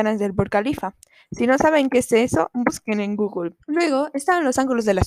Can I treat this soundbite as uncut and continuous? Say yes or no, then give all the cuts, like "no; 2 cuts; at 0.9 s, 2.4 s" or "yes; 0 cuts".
no; 1 cut; at 3.6 s